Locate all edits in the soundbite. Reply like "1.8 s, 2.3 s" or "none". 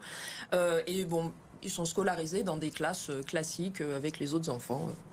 1.6 s

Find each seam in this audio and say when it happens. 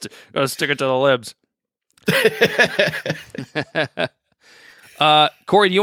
none

